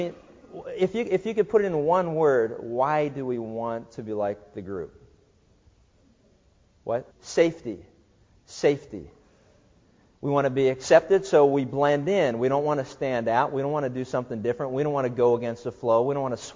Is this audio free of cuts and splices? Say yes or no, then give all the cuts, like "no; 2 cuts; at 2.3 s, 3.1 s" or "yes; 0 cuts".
no; 2 cuts; at 7.1 s, 10.2 s